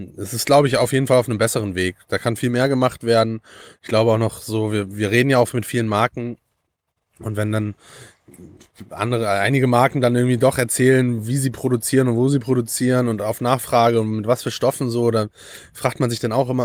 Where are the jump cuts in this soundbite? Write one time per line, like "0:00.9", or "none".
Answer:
none